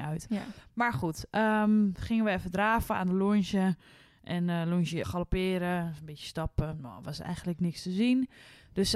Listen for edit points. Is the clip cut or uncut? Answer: cut